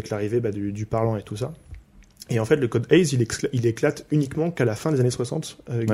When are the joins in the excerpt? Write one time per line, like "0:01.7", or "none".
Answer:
none